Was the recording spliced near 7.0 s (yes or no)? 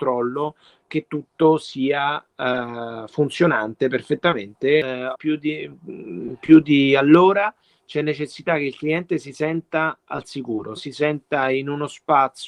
no